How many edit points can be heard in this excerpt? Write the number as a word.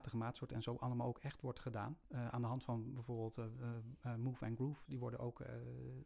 two